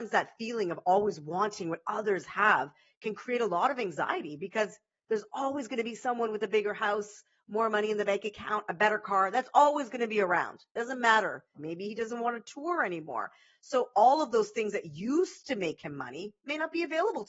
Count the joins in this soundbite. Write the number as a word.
one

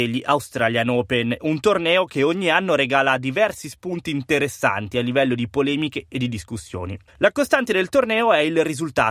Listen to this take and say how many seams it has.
two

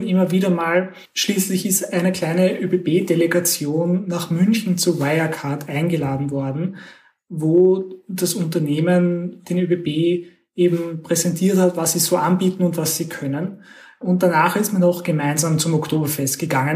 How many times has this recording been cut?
zero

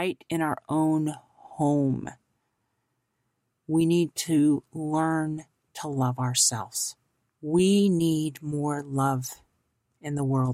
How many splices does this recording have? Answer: one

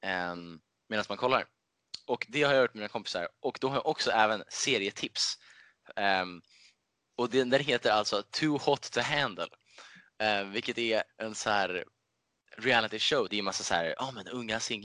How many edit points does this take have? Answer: two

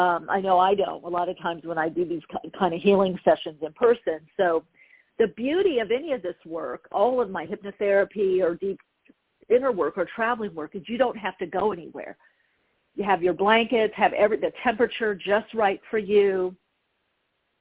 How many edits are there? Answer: zero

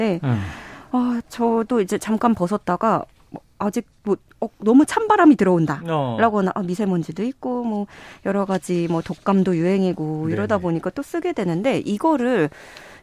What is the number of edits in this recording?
zero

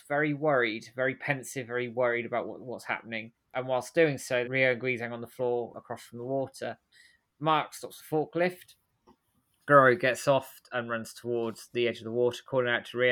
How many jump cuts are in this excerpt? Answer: two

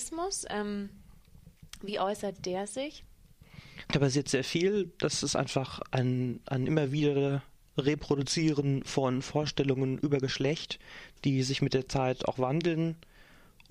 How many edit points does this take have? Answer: one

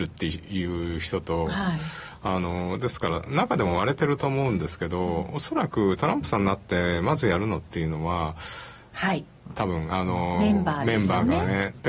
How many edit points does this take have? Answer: one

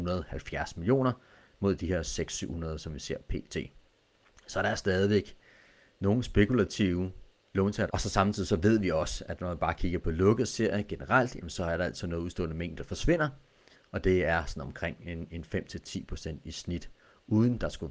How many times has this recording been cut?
one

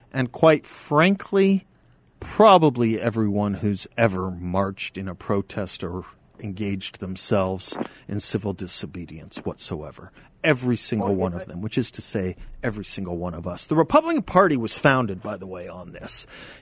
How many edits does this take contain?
zero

